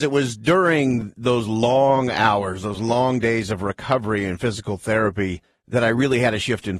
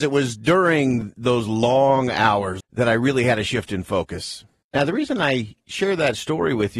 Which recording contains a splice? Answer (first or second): second